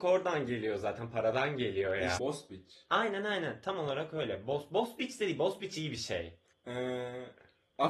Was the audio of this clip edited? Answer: yes; 2 cuts; at 2.2 s, 6.5 s

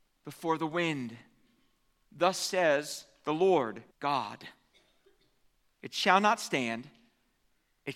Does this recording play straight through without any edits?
no; 2 cuts; at 2.1 s, 3.9 s

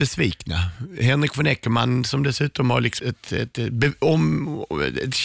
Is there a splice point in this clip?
yes; 1 cut; at 3.0 s

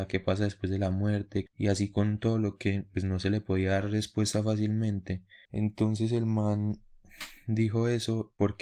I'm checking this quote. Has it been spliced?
yes; 2 cuts; at 1.5 s, 5.5 s

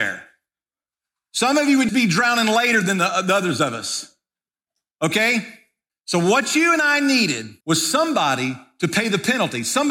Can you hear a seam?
yes; 3 cuts; at 1.9 s, 5.9 s, 7.6 s

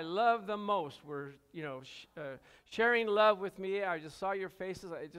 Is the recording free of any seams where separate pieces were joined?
yes; 0 cuts

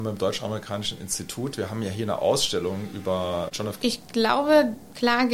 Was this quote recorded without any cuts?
no; 1 cut; at 3.8 s

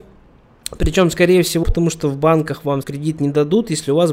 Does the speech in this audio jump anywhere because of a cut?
yes; 2 cuts; at 1.6 s, 2.8 s

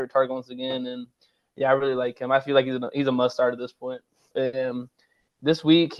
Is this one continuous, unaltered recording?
no; 1 cut; at 4.3 s

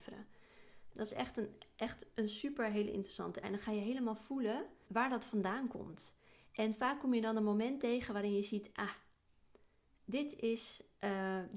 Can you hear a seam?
yes; 3 cuts; at 0.9 s, 3.4 s, 4.9 s

